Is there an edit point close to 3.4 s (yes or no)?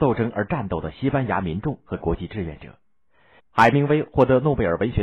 yes